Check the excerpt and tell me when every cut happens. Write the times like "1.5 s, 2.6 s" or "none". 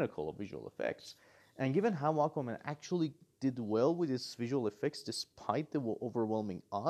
none

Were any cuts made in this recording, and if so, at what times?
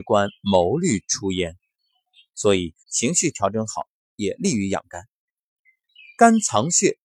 2.8 s

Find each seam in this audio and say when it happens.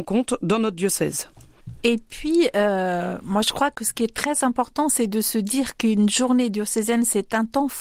none

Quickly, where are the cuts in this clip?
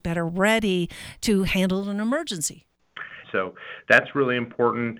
3.2 s

